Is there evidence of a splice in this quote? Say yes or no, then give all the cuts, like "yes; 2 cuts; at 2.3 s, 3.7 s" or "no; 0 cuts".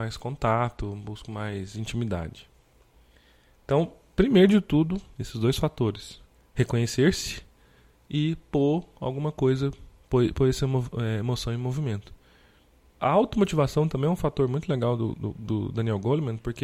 yes; 1 cut; at 5.1 s